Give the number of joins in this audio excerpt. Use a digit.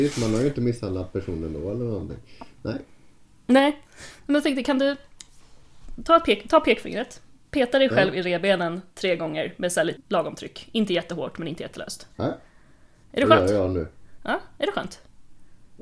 3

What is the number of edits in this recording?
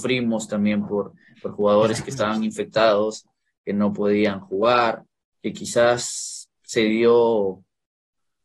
1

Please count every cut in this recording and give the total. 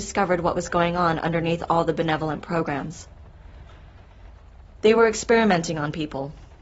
0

